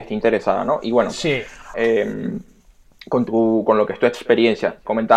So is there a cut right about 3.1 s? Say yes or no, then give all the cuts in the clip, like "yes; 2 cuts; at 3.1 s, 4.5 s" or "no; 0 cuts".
no; 1 cut; at 1.7 s